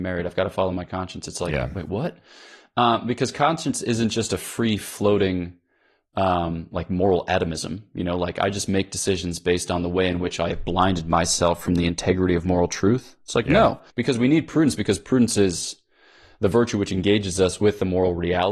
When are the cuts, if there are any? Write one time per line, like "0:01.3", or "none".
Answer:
0:13.9